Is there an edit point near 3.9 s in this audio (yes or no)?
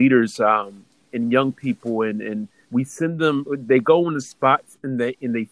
no